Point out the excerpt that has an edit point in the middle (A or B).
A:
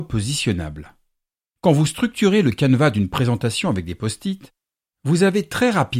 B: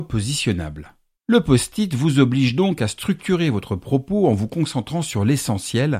B